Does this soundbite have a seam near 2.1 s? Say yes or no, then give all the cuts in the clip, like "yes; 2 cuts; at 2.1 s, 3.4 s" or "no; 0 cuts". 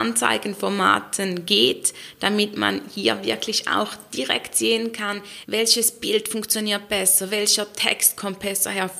no; 1 cut; at 5.4 s